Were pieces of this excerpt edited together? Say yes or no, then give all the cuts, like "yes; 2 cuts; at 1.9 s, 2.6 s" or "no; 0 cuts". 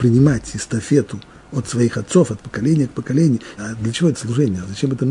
yes; 1 cut; at 3.6 s